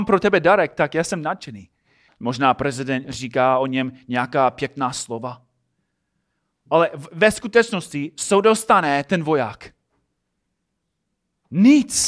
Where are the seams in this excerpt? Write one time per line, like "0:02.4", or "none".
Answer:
0:02.1